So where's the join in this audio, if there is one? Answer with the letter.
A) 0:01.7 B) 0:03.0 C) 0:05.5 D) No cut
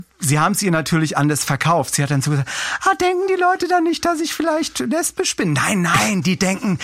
D